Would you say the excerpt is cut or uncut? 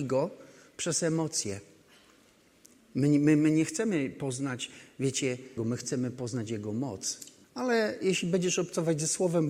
cut